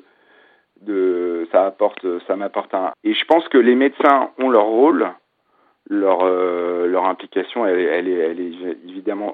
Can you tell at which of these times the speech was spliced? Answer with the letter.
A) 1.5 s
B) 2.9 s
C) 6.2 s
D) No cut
B